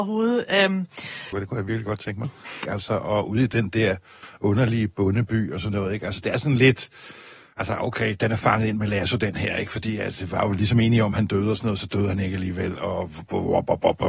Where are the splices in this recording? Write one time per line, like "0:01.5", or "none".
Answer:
0:01.3
0:02.6